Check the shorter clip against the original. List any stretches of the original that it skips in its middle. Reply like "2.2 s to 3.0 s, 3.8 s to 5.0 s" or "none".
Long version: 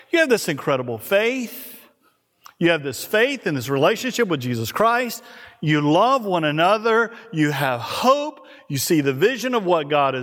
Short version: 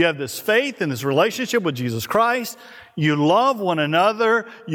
none